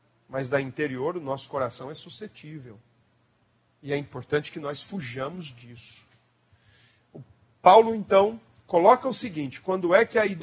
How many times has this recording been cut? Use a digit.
0